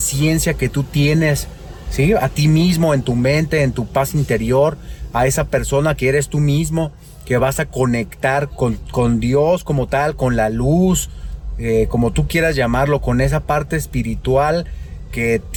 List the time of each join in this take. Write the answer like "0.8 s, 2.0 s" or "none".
8.5 s